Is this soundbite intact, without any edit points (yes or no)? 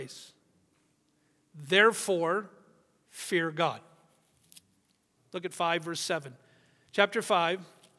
no